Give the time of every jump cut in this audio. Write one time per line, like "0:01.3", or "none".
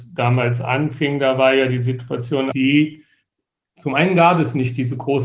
0:02.5